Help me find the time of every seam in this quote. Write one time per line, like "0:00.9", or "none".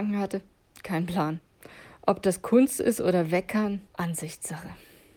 0:03.9